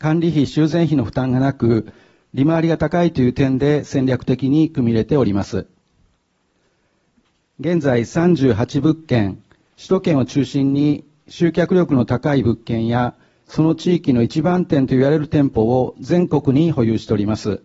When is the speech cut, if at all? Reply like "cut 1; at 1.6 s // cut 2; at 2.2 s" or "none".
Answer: cut 1; at 2.2 s